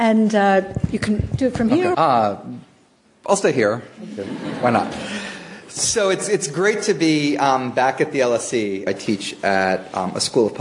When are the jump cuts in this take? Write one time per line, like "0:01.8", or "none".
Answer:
0:01.9
0:08.9